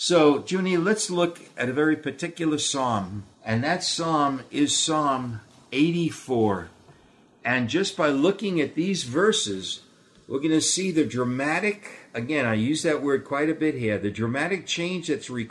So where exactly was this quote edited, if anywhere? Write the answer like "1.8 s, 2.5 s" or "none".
3.3 s